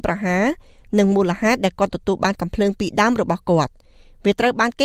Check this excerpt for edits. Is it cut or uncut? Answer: uncut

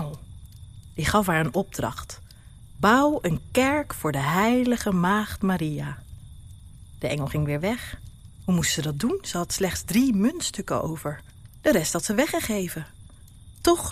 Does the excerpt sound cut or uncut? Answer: cut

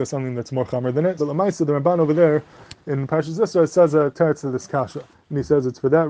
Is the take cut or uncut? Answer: cut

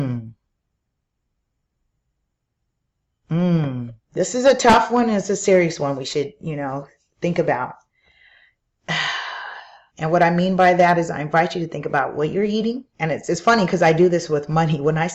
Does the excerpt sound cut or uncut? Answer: cut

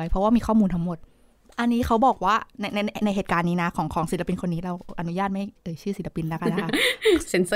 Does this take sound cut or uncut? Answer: uncut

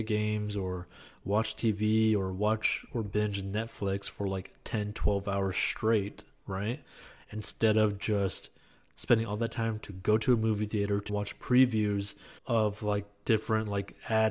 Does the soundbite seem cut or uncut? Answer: cut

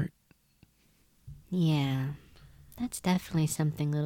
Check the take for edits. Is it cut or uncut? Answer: cut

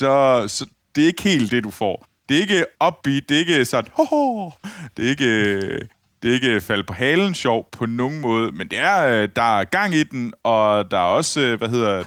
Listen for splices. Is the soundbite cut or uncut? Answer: uncut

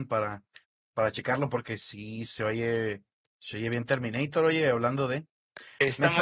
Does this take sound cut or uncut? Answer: uncut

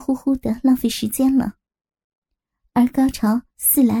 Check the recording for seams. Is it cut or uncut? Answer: uncut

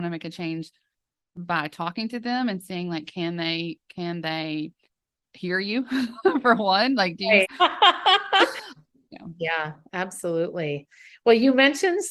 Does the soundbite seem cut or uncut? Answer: cut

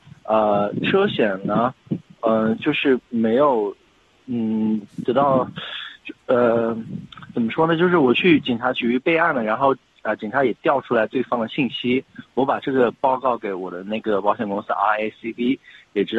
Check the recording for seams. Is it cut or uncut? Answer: uncut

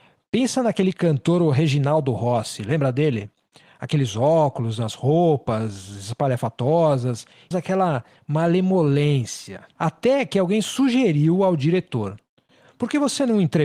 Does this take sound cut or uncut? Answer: cut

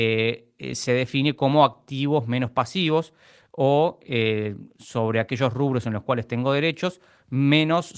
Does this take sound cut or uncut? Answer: uncut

